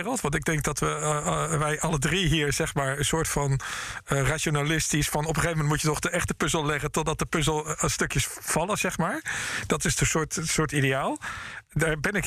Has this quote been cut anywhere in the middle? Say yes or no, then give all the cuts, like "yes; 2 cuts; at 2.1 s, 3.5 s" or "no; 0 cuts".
no; 0 cuts